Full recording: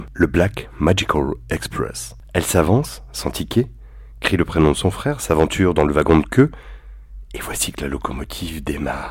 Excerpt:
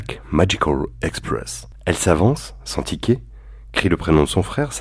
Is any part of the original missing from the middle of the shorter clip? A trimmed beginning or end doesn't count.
no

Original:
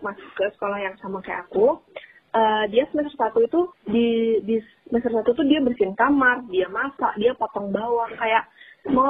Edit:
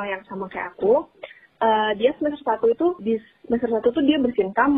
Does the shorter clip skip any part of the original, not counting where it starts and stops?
yes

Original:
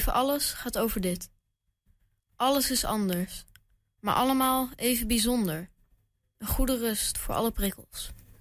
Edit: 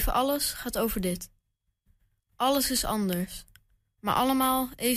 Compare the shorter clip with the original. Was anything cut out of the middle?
no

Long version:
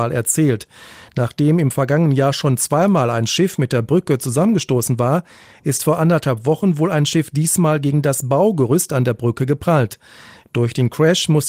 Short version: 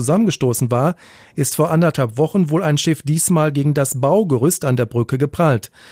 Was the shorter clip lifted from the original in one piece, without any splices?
yes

